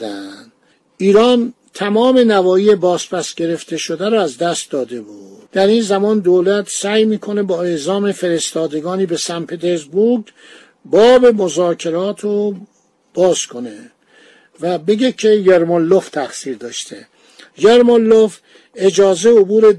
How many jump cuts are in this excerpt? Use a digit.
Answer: 1